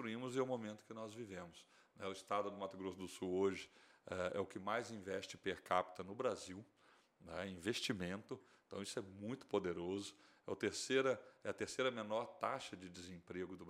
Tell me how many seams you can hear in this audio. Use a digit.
0